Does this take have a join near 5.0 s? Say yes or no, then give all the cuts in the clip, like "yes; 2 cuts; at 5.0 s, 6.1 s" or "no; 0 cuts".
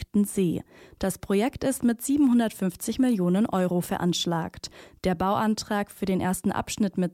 no; 0 cuts